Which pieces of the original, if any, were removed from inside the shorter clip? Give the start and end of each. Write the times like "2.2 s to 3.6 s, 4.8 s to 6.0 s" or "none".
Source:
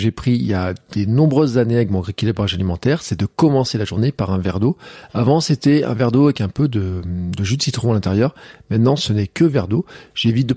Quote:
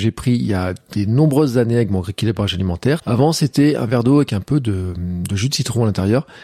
3.0 s to 5.1 s

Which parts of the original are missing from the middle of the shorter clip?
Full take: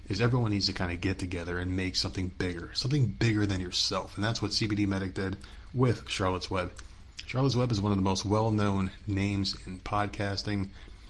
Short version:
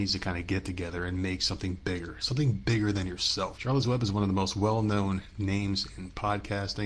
4.1 s to 7.3 s

